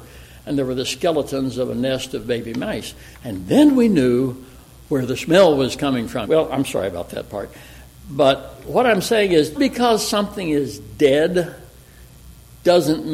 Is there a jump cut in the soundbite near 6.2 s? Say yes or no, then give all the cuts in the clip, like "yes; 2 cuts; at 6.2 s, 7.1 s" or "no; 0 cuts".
yes; 2 cuts; at 6.2 s, 9.5 s